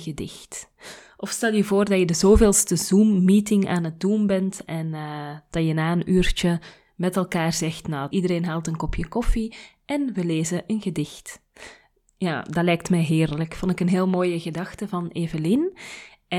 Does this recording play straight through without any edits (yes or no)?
no